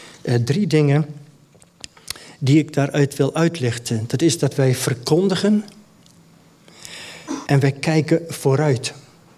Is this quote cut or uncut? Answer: cut